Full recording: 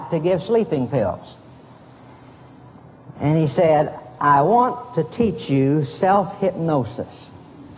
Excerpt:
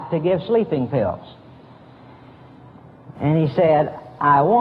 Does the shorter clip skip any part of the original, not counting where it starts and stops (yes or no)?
no